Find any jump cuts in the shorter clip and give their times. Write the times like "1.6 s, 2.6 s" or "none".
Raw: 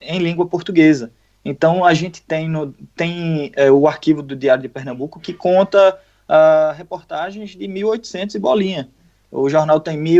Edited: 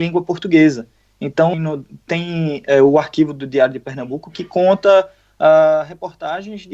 1.5 s